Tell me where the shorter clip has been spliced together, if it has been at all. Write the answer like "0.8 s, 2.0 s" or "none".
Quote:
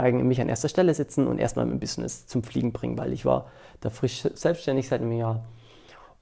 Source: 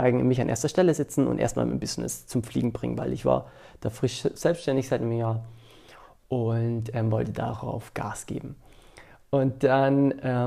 none